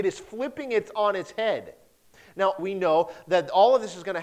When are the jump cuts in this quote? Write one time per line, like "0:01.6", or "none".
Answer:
0:02.6